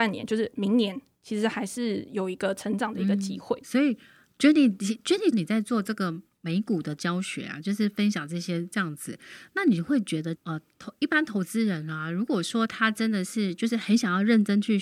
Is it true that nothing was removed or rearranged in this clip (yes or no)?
no